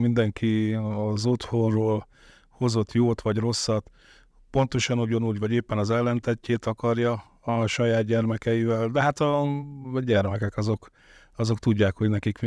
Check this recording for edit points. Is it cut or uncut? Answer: uncut